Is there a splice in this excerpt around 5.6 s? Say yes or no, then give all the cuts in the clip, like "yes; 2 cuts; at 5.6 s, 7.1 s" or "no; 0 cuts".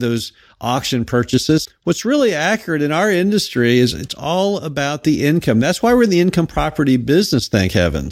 no; 1 cut; at 1.6 s